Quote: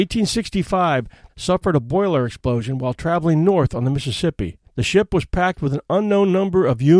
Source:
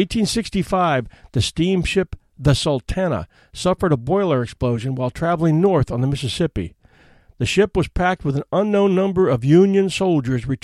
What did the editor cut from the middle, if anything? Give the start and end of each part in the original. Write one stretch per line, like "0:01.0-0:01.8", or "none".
0:01.3-0:03.5
0:06.8-0:07.3